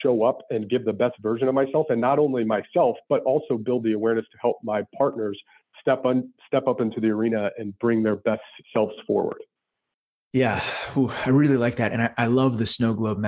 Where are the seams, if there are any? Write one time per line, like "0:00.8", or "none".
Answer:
0:08.6